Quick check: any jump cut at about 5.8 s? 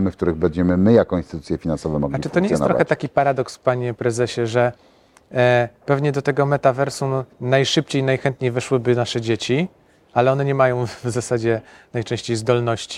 no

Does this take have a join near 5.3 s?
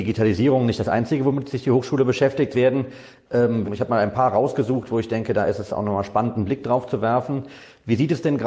no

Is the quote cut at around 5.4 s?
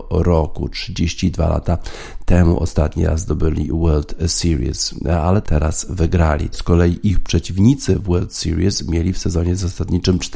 yes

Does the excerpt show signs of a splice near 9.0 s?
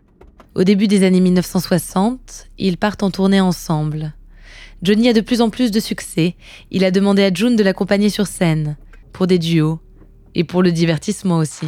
yes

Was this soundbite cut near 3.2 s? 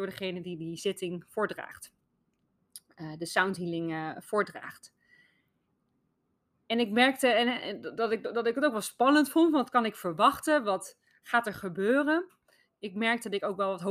no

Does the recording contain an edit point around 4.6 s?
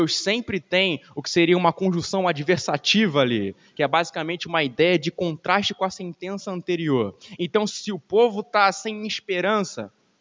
no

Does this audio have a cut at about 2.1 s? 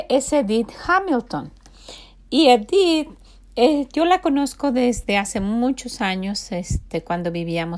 no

